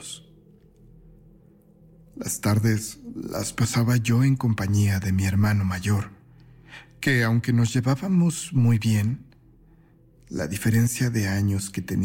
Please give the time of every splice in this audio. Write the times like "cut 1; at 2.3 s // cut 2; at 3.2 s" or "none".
none